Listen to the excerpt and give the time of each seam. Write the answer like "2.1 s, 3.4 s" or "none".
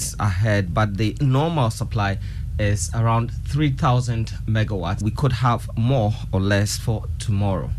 5.0 s